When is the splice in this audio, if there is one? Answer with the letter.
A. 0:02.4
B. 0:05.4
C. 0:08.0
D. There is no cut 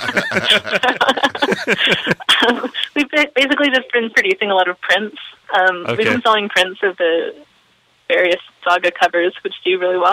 D